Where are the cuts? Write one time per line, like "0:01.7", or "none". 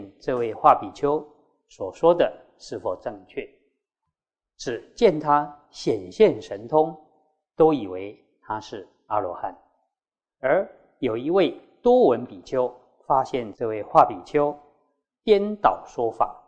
none